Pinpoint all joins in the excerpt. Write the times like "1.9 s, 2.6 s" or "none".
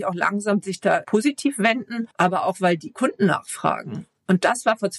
1.0 s, 2.1 s